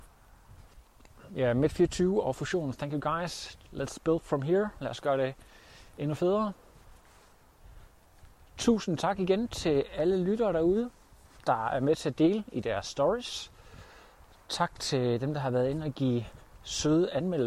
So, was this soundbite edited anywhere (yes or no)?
no